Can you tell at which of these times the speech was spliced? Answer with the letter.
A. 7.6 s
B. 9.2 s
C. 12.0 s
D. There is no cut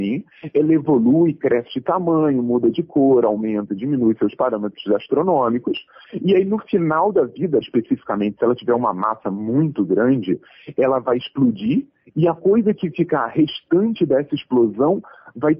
A